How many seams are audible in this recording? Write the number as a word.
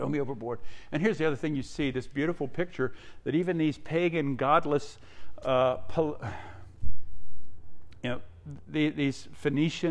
zero